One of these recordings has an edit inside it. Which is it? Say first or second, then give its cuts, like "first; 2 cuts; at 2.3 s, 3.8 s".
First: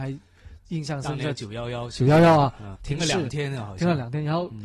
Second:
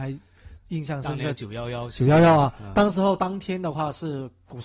first; 1 cut; at 2.8 s